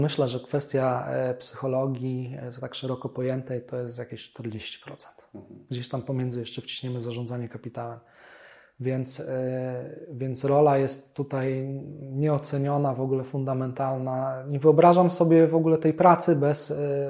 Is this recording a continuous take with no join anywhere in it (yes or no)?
yes